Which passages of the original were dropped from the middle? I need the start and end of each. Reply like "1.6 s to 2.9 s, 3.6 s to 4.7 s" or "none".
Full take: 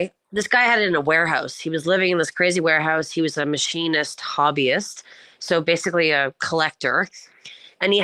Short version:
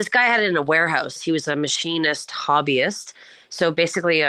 1.5 s to 3.1 s